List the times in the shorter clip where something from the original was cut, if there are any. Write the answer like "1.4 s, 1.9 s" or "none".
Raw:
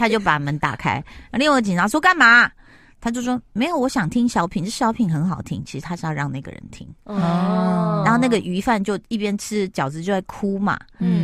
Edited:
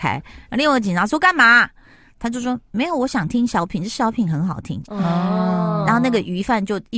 4.8 s